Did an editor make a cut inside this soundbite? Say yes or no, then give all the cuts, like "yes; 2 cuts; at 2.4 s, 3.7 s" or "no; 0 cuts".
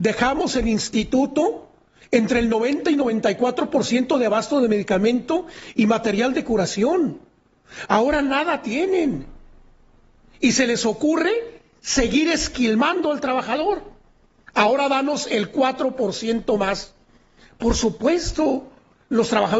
no; 0 cuts